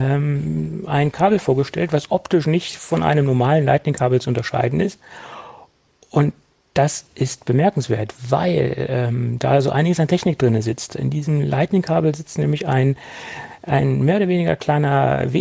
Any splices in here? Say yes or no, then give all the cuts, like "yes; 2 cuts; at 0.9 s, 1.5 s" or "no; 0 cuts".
no; 0 cuts